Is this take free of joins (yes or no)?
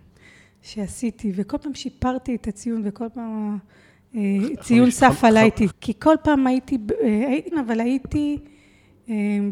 no